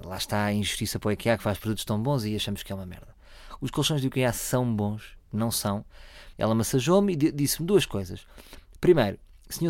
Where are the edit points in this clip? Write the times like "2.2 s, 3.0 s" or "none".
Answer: 6.3 s